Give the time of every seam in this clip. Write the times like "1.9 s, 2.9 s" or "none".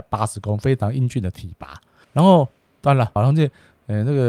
2.0 s, 3.2 s